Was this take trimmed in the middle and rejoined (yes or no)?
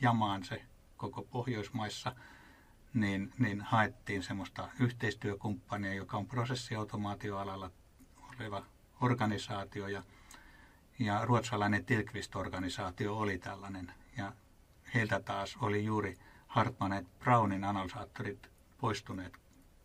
no